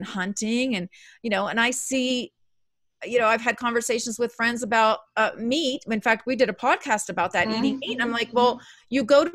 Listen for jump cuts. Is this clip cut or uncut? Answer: uncut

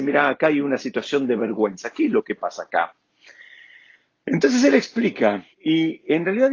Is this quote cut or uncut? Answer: cut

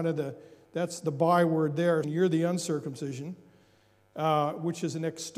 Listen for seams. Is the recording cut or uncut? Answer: cut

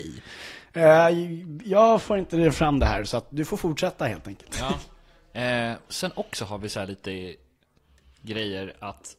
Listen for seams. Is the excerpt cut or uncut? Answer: uncut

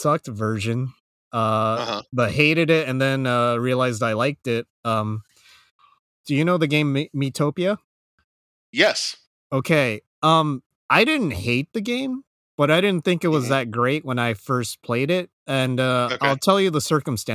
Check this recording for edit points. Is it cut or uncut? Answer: uncut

